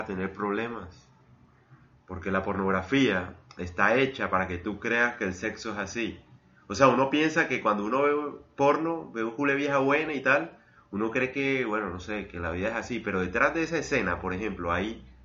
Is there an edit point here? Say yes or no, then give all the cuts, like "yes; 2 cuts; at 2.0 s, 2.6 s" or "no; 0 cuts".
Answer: no; 0 cuts